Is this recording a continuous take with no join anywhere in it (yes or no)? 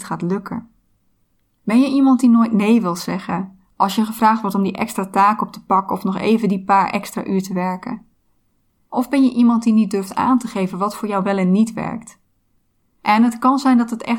yes